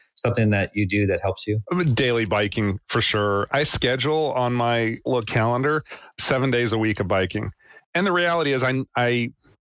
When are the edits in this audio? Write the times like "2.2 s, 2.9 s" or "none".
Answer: none